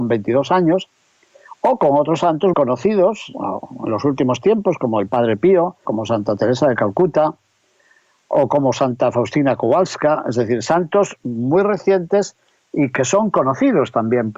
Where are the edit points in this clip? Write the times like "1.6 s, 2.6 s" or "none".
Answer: 2.5 s, 5.8 s